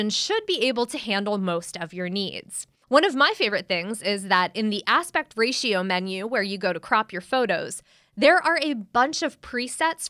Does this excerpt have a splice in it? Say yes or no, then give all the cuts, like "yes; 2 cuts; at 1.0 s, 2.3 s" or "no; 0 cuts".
yes; 1 cut; at 2.8 s